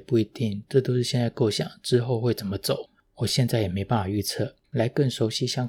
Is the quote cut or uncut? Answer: cut